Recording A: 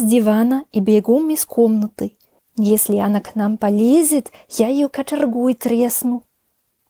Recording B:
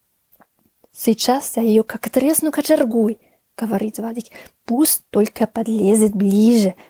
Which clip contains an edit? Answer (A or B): A